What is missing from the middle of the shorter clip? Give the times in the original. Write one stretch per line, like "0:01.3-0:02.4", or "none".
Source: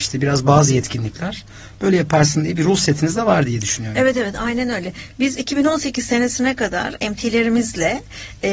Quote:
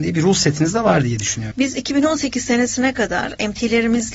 0:03.9-0:05.1